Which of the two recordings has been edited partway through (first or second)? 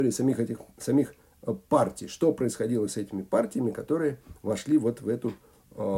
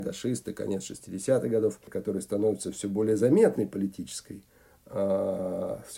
second